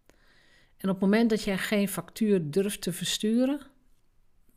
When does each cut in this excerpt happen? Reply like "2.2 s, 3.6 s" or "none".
none